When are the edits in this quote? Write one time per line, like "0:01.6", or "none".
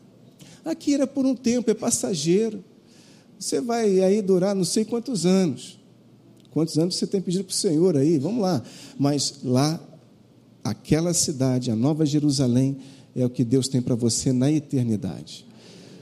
none

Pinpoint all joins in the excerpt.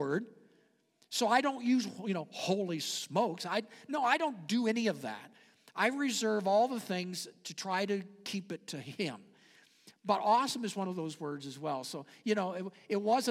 none

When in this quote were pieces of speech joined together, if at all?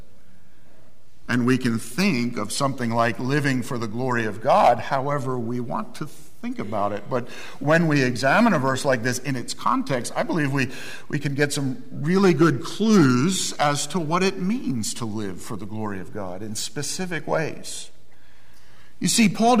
none

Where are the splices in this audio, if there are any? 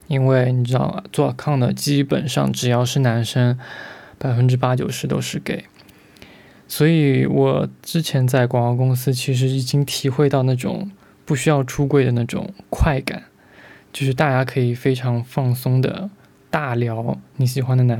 none

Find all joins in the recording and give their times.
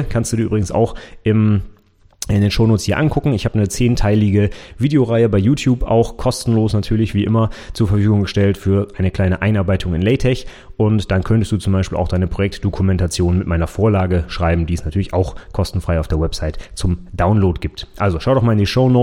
none

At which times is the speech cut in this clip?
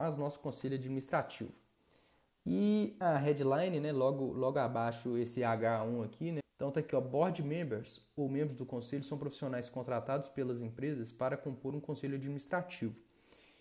0:06.4

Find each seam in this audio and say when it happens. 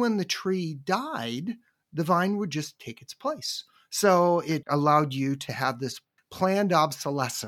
0:04.6
0:06.2

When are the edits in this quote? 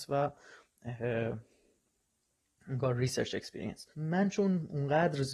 0:03.9

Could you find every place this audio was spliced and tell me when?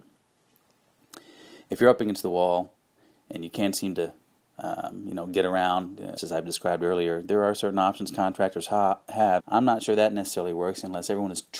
0:06.2
0:09.4

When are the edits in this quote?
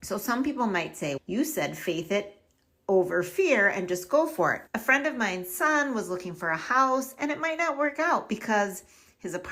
0:01.2
0:04.7

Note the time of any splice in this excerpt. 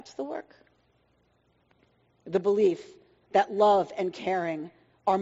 0:02.1

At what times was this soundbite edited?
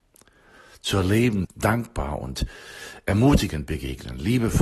0:01.4

